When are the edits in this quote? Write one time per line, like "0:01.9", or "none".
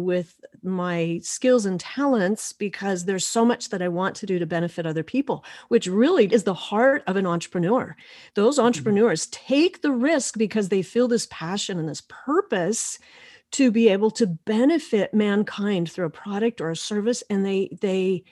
0:06.3